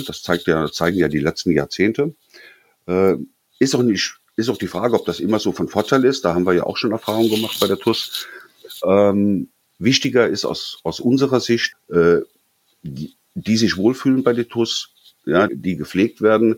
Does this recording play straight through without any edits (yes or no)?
no